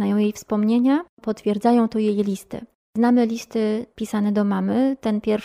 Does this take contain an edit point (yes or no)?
no